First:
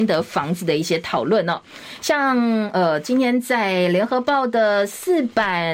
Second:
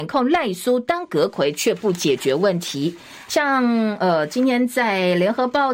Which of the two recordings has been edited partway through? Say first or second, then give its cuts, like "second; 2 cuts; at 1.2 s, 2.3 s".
second; 1 cut; at 3.3 s